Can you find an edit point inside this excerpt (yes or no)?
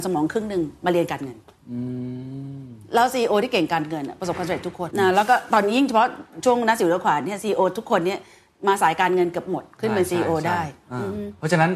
yes